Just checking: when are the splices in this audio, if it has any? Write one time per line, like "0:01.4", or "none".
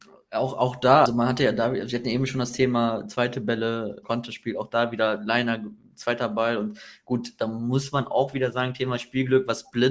0:01.1
0:04.0